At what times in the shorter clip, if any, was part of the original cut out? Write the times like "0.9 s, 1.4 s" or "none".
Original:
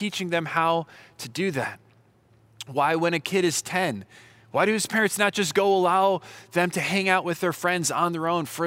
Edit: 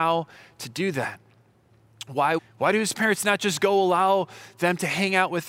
2.4 s